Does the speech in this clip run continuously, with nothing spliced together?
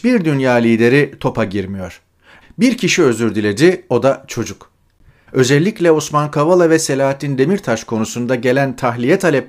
no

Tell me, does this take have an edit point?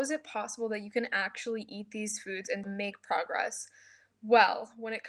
yes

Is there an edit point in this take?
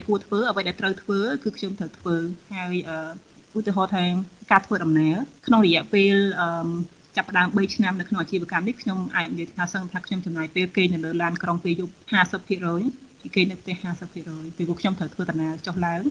yes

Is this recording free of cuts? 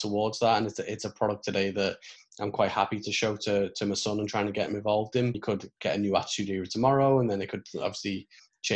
no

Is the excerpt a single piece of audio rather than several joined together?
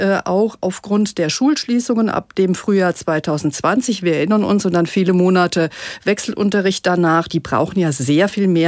no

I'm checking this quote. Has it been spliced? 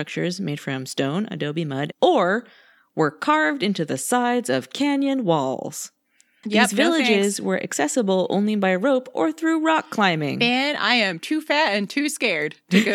yes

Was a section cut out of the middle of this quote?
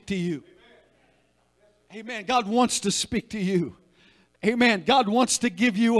no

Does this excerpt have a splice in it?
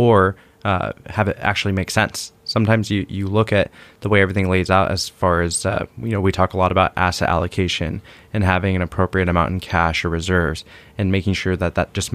no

